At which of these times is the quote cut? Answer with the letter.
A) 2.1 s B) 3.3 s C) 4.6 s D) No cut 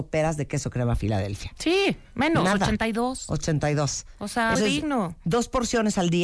C